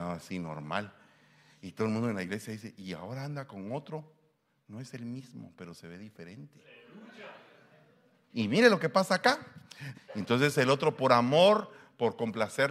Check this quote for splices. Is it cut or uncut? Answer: cut